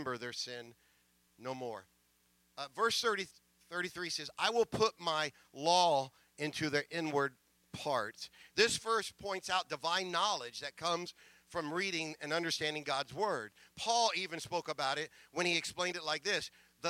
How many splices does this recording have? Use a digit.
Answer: 1